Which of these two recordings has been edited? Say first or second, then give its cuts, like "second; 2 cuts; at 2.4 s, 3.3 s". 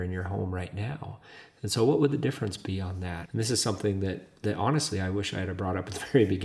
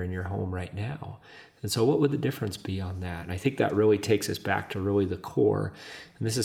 first; 1 cut; at 3.3 s